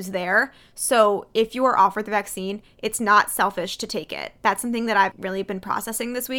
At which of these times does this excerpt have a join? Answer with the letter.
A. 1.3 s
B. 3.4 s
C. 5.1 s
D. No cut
C